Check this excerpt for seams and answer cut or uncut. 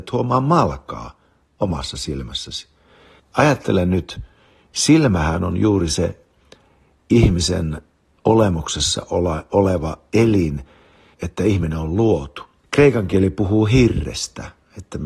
cut